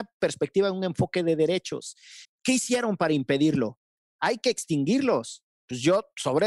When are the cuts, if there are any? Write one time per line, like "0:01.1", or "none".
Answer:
0:02.2